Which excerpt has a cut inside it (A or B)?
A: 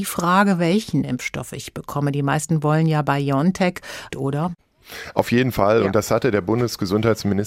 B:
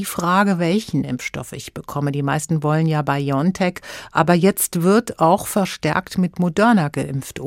A